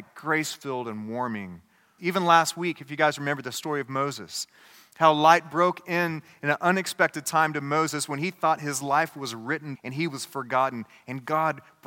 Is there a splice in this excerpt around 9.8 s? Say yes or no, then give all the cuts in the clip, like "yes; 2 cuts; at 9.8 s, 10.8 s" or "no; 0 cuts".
yes; 2 cuts; at 2.0 s, 9.8 s